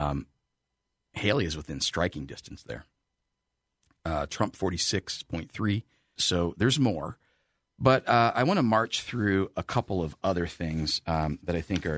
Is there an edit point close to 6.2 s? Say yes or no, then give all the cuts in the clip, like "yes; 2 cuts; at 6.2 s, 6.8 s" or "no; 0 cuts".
yes; 1 cut; at 6.2 s